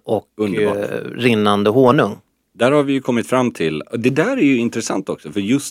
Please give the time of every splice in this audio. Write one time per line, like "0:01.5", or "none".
none